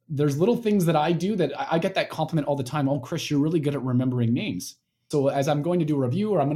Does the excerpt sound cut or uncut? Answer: cut